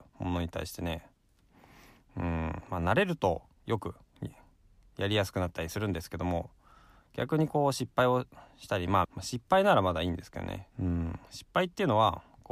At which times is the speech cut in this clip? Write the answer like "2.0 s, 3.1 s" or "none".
9.0 s, 10.7 s